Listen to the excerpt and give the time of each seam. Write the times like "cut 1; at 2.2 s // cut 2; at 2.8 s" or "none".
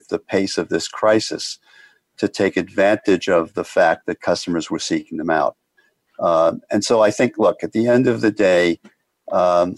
none